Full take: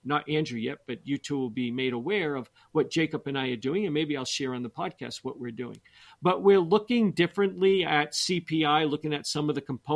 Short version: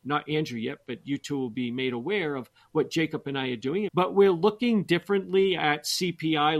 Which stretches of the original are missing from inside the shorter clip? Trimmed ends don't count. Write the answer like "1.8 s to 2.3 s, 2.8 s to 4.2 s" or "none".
3.9 s to 6.2 s